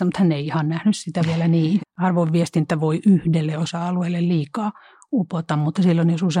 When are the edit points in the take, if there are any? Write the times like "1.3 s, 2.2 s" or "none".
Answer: 1.8 s